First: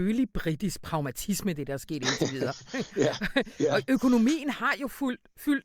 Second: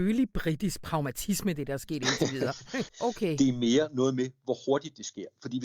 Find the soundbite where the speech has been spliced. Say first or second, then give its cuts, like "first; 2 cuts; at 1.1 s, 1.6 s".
second; 1 cut; at 2.9 s